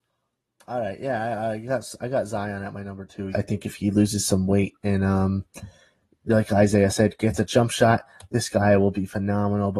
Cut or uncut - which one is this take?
cut